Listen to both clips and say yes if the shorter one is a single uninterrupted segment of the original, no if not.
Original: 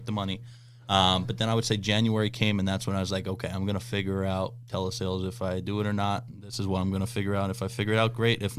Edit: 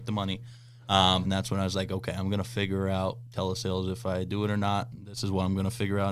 no